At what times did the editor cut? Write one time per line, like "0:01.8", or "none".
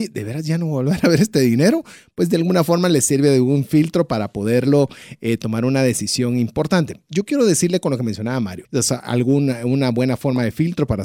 0:08.6